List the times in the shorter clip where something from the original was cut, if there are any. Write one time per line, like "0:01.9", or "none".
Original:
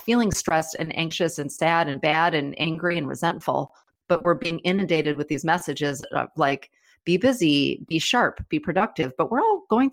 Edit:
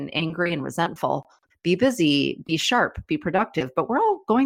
0:01.5